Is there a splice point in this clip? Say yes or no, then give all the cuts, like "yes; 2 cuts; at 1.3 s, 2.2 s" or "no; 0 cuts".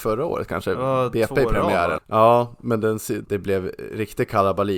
yes; 2 cuts; at 2.0 s, 3.2 s